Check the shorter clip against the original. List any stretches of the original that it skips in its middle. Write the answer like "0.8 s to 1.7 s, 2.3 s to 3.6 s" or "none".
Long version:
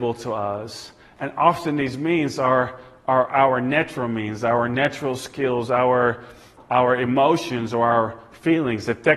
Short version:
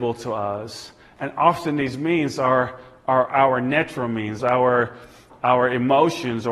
4.4 s to 5.7 s